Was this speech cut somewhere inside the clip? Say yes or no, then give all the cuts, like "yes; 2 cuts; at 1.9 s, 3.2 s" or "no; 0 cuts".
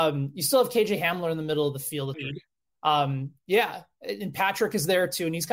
yes; 1 cut; at 2.1 s